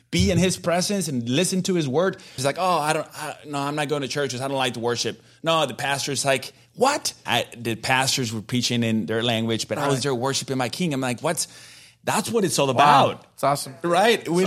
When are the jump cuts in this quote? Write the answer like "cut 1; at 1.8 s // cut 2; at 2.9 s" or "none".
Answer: cut 1; at 2.4 s // cut 2; at 7.3 s